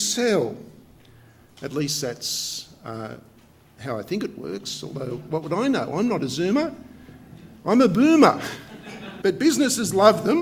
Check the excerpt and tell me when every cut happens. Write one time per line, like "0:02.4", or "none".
0:09.2